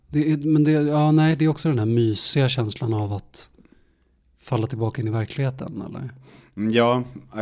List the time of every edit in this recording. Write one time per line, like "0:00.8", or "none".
none